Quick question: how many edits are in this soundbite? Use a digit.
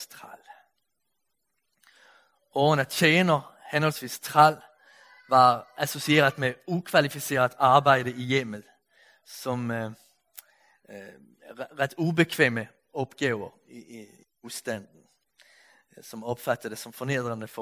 0